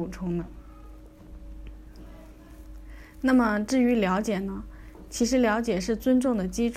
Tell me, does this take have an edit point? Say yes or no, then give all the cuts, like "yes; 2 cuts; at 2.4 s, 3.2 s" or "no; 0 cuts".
no; 0 cuts